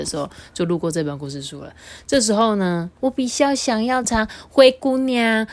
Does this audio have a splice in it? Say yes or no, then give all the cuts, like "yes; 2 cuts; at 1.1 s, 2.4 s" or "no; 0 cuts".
yes; 2 cuts; at 3.0 s, 4.0 s